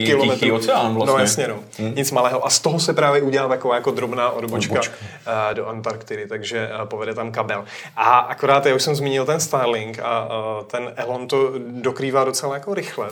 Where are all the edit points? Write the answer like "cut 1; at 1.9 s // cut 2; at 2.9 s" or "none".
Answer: none